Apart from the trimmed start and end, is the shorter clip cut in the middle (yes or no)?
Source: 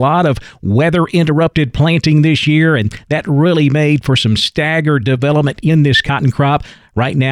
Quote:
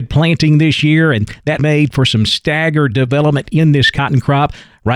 yes